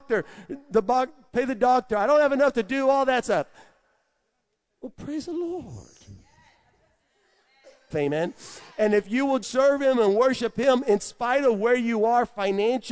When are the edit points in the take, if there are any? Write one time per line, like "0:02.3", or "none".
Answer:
0:07.9
0:09.4